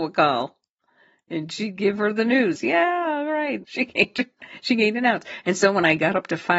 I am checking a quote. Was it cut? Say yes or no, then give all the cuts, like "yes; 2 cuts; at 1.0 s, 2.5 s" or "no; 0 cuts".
yes; 2 cuts; at 2.6 s, 3.6 s